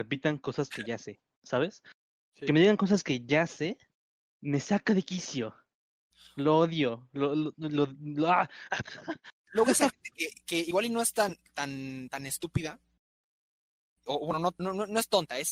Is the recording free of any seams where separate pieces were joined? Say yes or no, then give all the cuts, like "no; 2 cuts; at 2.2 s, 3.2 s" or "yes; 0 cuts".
yes; 0 cuts